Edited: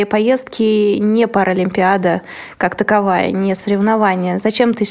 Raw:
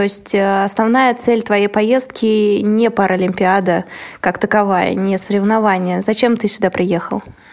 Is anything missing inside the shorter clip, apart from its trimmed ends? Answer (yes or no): no